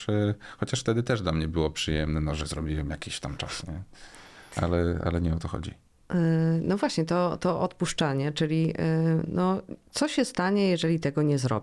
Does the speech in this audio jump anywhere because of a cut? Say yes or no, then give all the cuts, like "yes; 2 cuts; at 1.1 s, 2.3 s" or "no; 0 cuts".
no; 0 cuts